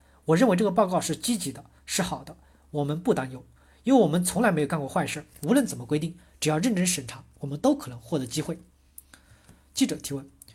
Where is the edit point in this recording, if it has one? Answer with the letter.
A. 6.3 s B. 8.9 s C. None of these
C